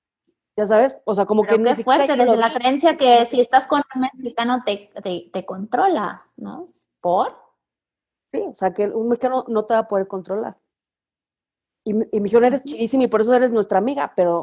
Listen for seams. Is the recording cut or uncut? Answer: uncut